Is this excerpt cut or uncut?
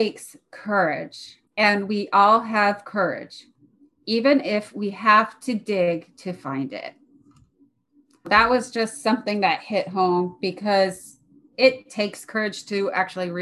uncut